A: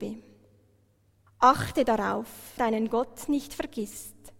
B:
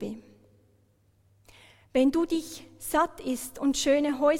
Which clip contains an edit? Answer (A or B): A